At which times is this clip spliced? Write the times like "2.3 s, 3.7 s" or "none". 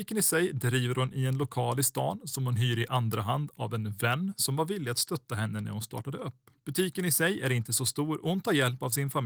6.6 s